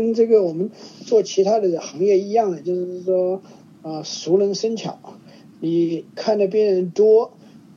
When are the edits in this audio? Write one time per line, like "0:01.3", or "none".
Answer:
none